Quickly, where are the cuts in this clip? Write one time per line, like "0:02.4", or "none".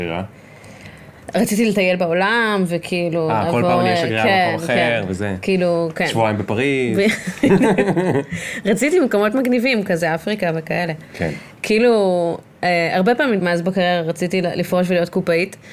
0:11.5
0:13.4